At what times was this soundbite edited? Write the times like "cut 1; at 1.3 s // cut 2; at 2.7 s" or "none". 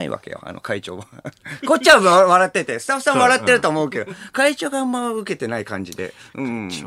cut 1; at 1.6 s

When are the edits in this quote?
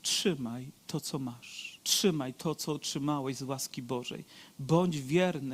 cut 1; at 1.8 s

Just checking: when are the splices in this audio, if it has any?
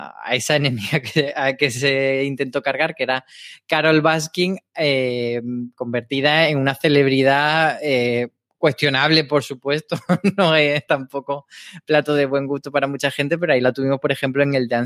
none

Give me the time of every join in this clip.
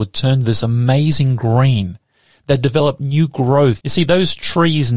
cut 1; at 3.8 s

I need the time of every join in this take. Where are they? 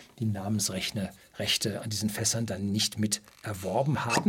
none

